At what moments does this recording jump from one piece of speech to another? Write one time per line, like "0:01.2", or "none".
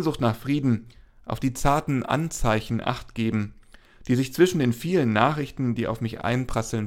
none